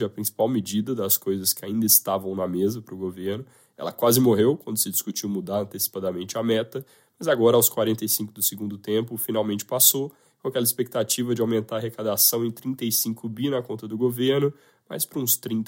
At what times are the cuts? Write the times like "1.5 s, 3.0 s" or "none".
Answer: none

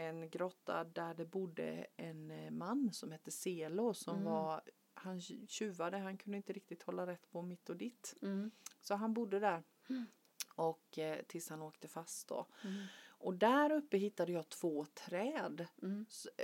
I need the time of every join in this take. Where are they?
none

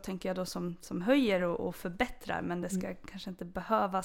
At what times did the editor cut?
none

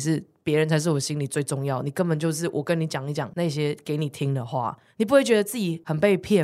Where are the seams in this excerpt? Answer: none

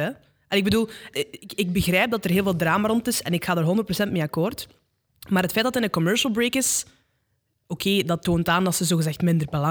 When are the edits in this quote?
1.1 s

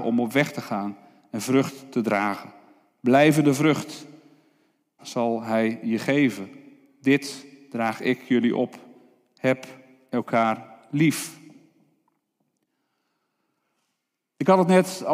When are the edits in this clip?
5.0 s

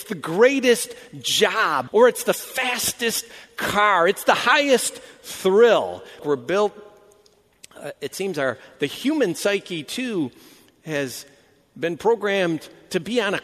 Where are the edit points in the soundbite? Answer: 1.9 s, 6.2 s

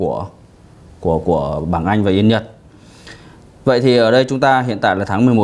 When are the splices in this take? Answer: none

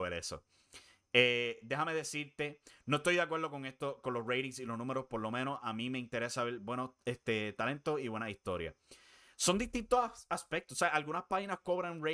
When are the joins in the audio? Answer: none

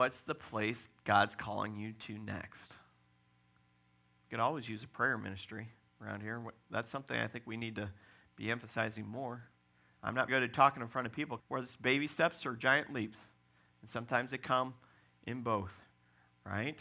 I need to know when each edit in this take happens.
10.3 s, 11.4 s

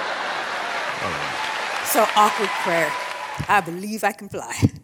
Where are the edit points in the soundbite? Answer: none

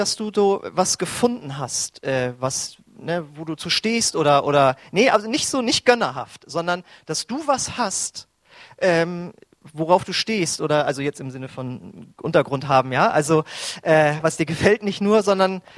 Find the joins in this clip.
2.9 s

